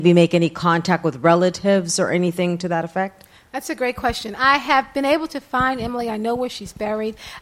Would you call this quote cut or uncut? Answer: uncut